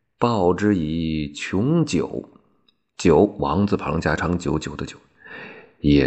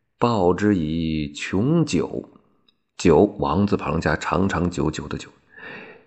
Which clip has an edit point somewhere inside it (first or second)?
first